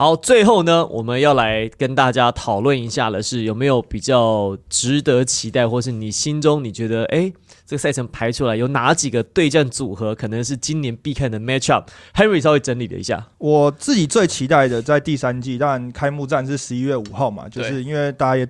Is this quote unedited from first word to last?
yes; 0 cuts

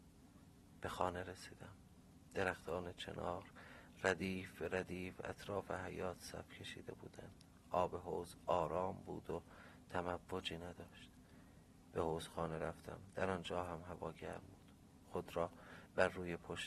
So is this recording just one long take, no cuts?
yes; 0 cuts

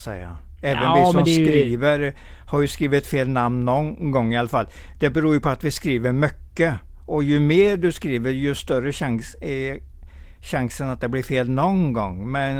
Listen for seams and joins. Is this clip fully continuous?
yes; 0 cuts

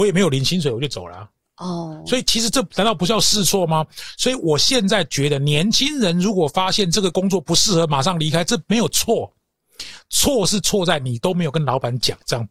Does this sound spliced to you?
no; 0 cuts

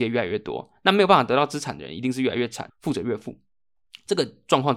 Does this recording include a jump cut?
yes; 1 cut; at 2.7 s

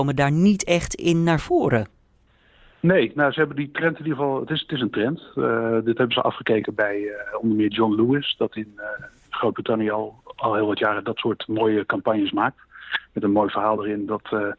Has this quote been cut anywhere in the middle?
no; 0 cuts

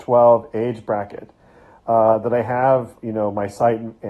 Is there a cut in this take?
yes; 2 cuts; at 1.8 s, 3.0 s

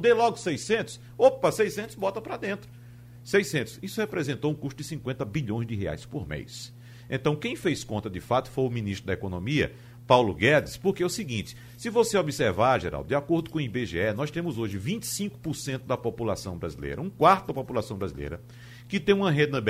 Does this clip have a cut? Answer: no; 0 cuts

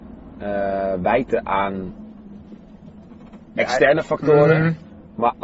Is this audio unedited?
yes; 0 cuts

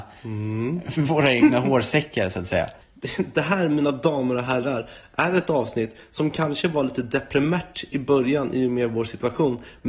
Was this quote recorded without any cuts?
yes; 0 cuts

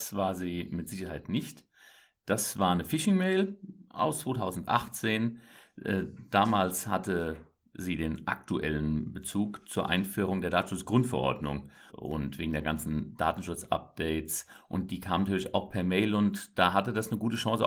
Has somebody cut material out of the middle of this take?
yes; 1 cut; at 11.9 s

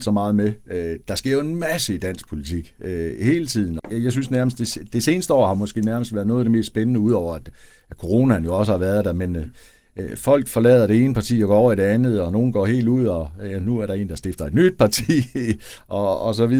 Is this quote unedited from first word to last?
no; 1 cut; at 3.8 s

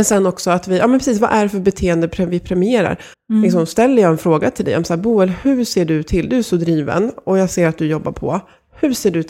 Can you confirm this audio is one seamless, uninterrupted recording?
no; 1 cut; at 3.1 s

